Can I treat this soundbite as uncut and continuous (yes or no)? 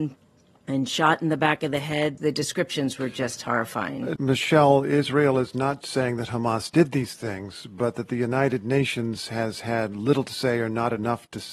no